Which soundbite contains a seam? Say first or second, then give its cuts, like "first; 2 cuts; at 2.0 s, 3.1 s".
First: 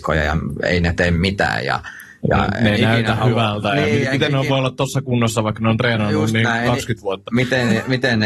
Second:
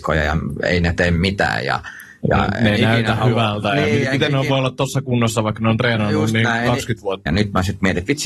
second; 1 cut; at 7.3 s